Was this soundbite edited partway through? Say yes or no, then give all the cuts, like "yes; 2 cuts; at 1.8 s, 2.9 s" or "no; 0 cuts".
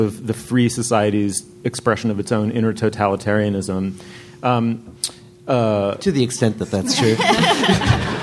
no; 0 cuts